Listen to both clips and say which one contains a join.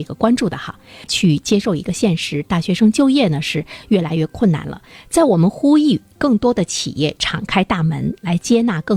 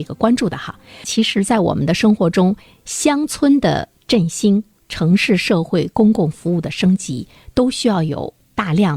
first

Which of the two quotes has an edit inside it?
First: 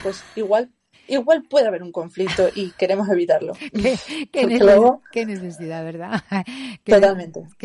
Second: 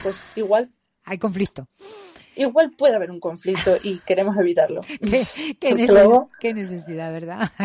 first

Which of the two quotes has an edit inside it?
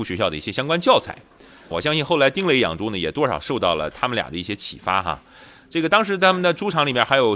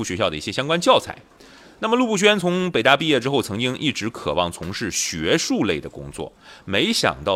first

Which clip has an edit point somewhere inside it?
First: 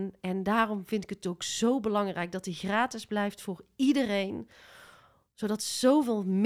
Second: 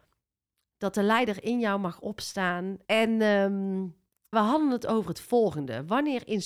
second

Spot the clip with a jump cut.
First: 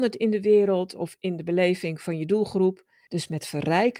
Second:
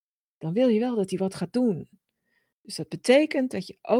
first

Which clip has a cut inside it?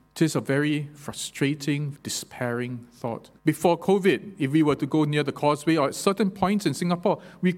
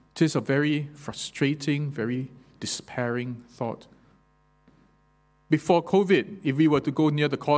first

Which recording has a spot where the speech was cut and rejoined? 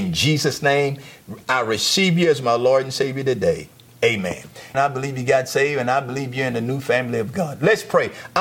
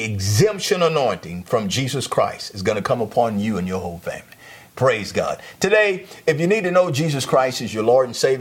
first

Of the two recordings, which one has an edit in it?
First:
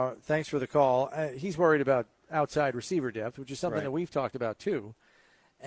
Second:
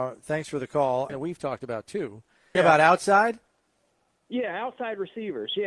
second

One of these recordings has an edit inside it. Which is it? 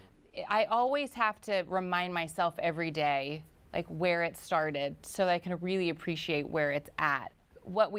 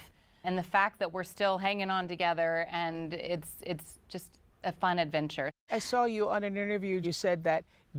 second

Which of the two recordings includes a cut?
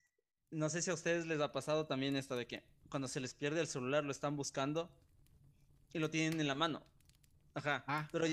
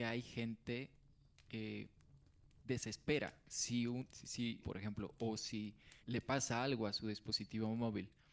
second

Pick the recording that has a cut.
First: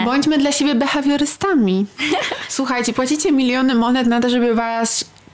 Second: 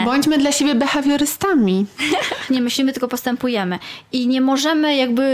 second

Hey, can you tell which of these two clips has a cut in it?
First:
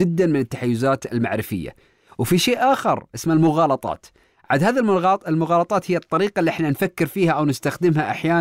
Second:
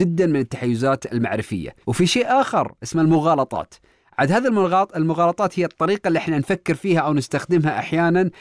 second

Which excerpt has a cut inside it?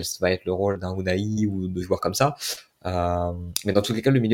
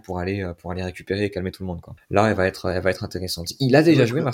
second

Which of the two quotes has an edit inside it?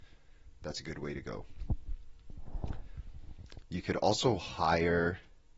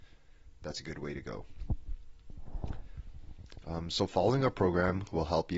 first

